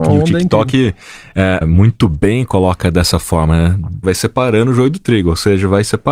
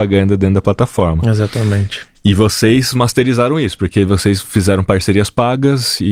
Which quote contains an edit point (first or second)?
first